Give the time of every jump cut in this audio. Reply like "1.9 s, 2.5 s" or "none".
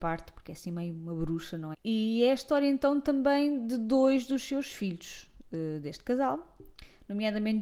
1.7 s